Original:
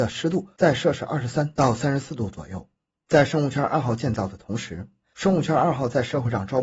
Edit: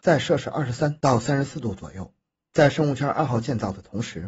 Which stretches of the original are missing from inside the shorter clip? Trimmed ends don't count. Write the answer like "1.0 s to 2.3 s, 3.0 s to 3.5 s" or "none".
none